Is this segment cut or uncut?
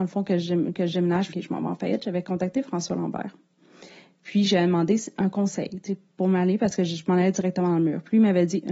cut